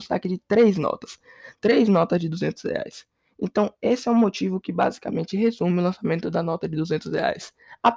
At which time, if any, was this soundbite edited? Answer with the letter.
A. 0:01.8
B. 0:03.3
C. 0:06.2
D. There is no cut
D